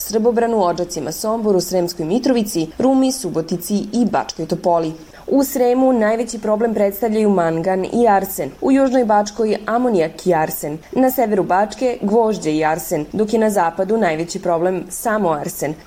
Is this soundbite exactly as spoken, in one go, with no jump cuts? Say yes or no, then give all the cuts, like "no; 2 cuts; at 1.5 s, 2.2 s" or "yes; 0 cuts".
yes; 0 cuts